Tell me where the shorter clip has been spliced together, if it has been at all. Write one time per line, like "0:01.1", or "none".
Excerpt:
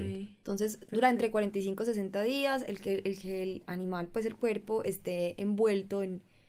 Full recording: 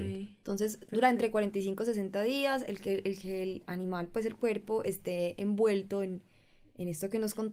none

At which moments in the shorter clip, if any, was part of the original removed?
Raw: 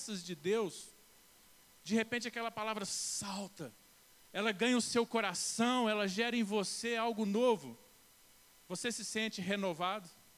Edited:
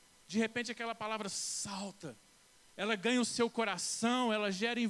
none

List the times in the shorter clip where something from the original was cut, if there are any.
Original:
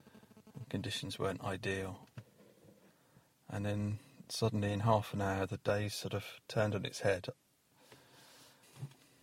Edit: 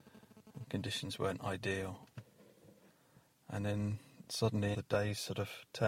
0:04.7

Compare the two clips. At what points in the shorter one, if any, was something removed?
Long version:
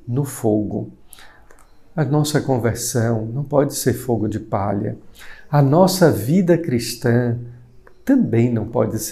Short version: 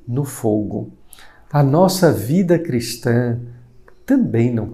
0:01.5

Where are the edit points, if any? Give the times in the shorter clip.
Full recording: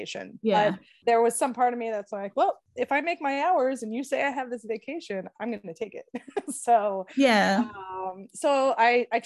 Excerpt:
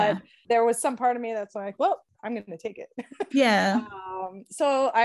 0:02.1
0:03.3

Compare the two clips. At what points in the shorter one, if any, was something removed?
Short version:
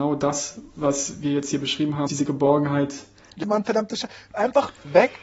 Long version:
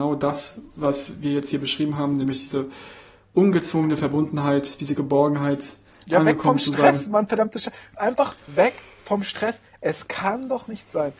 0:02.1
0:03.4

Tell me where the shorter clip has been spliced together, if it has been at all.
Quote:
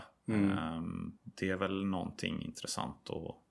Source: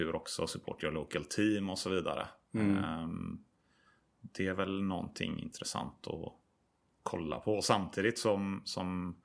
0:01.2

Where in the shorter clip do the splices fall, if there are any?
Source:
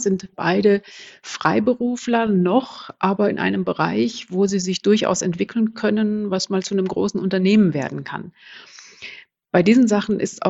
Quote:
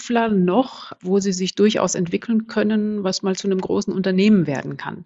0:01.0

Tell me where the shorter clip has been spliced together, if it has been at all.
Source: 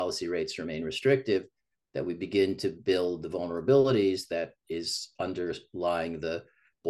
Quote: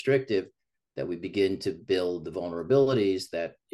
none

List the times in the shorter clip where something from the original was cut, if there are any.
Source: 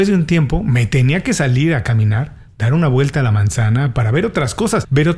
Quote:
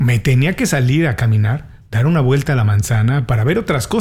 none

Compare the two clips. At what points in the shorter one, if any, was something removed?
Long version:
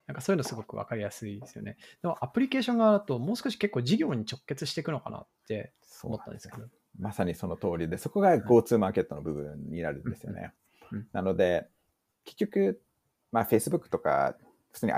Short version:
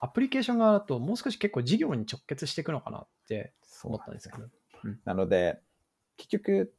0:04.7

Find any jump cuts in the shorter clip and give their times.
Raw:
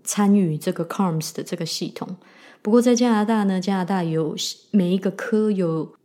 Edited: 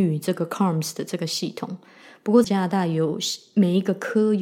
0:02.4

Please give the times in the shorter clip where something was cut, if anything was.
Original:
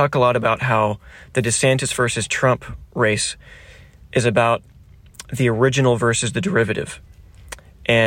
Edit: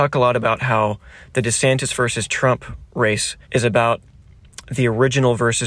0:03.4

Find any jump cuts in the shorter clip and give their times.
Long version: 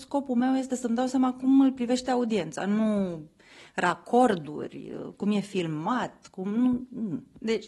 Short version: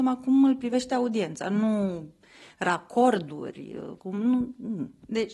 0:04.0

